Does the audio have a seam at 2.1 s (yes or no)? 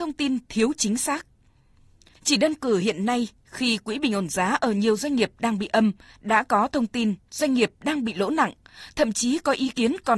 yes